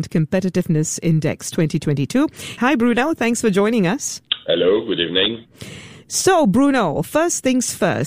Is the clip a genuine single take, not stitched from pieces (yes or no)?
no